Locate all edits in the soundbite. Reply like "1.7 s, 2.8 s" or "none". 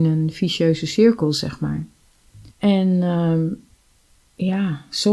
2.5 s